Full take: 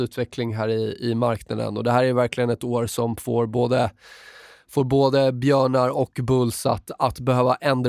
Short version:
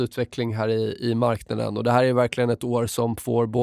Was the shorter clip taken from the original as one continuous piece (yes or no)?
yes